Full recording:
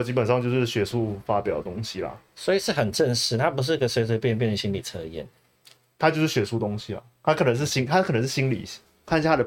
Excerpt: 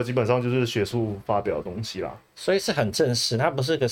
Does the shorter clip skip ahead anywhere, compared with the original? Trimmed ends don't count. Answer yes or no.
no